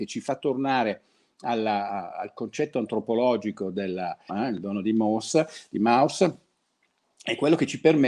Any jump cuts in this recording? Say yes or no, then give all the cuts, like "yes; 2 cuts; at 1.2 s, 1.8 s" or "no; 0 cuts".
yes; 2 cuts; at 2.1 s, 4.3 s